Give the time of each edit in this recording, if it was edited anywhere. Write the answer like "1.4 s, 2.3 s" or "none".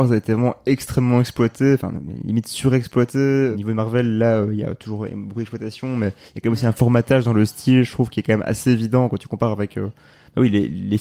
none